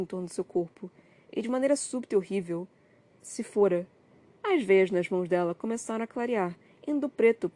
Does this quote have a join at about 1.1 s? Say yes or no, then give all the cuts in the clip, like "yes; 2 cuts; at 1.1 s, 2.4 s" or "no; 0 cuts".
no; 0 cuts